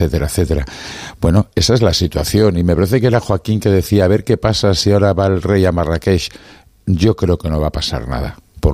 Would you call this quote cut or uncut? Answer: uncut